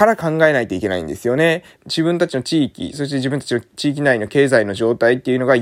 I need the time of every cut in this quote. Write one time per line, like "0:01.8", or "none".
0:01.7